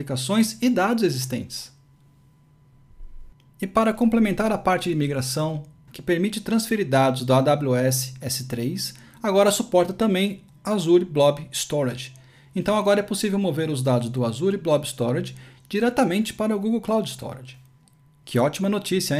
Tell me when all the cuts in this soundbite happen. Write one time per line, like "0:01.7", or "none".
0:05.9